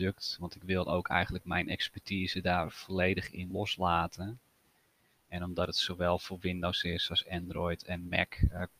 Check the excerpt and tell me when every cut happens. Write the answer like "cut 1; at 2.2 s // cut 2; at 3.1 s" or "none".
cut 1; at 3.5 s